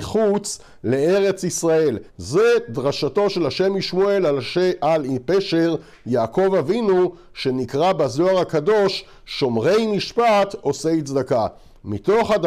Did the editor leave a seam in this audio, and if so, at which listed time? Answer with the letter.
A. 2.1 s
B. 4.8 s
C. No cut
A